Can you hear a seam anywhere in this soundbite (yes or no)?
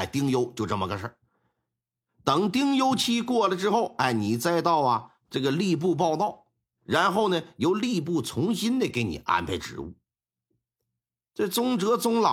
no